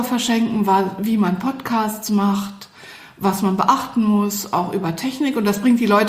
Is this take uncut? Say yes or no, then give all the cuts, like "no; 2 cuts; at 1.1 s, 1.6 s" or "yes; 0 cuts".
yes; 0 cuts